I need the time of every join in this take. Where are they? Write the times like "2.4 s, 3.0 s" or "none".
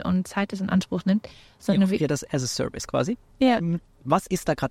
3.3 s